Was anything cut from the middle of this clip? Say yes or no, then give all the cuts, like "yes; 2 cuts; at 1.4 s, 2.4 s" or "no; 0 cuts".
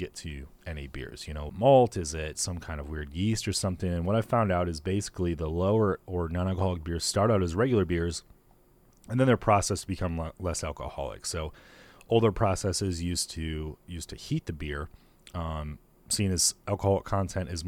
yes; 1 cut; at 1.5 s